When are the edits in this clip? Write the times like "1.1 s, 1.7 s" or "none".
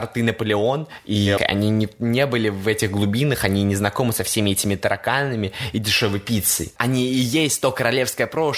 1.4 s, 6.8 s